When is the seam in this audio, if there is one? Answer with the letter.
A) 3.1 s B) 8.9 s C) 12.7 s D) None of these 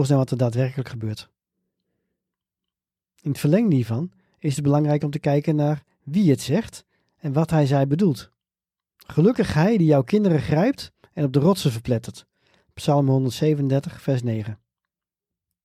B